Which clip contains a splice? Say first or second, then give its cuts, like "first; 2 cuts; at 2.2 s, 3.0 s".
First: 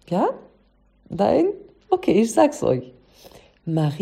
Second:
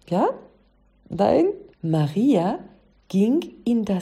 second; 1 cut; at 1.7 s